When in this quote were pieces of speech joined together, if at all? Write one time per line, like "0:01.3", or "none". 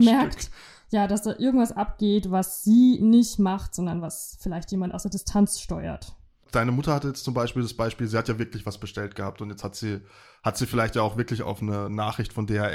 0:06.4